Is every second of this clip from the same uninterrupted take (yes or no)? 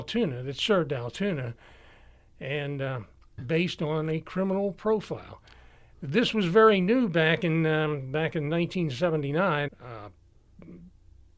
no